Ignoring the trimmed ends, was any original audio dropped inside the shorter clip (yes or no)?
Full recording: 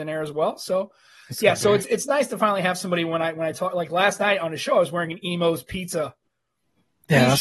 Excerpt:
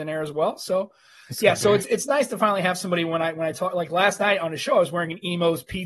no